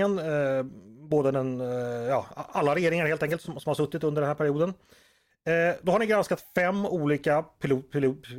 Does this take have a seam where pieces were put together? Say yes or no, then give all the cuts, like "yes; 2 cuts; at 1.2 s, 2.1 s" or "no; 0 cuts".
no; 0 cuts